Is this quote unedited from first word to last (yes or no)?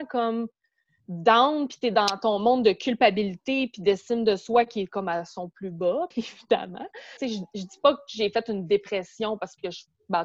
no